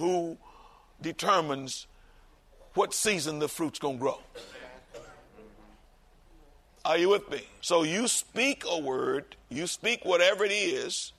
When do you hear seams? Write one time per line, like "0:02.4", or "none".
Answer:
0:07.6